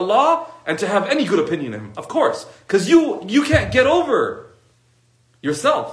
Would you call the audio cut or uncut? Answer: uncut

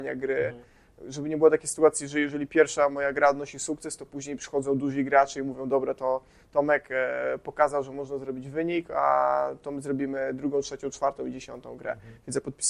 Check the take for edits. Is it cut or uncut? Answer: uncut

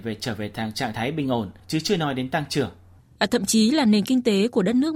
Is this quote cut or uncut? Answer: cut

